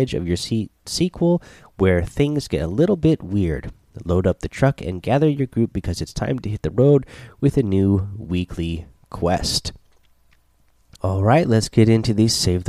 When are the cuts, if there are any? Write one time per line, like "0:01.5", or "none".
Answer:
0:11.0